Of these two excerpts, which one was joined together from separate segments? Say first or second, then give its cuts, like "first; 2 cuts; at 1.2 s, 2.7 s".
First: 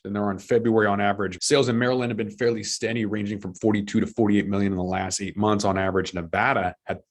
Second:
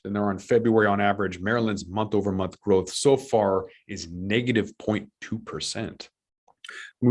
first; 1 cut; at 1.4 s